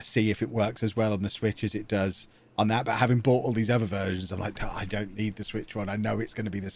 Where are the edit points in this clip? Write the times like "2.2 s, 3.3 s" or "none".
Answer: 4.9 s